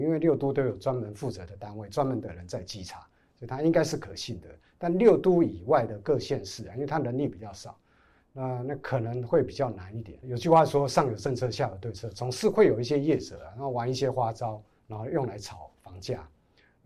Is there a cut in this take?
no; 0 cuts

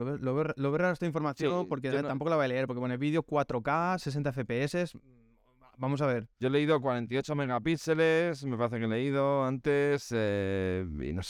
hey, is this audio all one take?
yes; 0 cuts

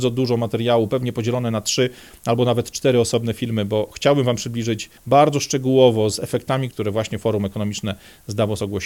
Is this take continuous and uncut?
no; 2 cuts; at 5.0 s, 6.7 s

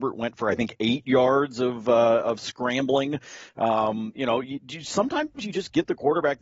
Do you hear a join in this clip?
no; 0 cuts

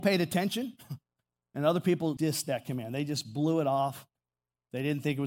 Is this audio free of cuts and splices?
no; 1 cut; at 2.2 s

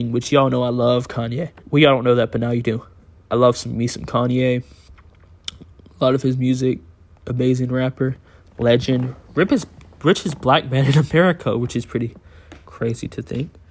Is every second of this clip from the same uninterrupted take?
no; 1 cut; at 1.6 s

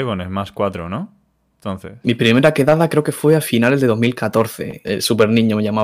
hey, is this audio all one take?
no; 2 cuts; at 2.0 s, 4.8 s

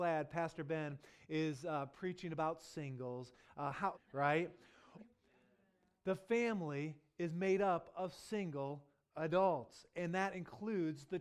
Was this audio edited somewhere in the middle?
yes; 2 cuts; at 3.9 s, 5.0 s

